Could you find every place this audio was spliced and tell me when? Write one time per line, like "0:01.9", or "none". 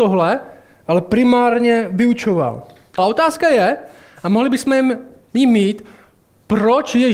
0:03.0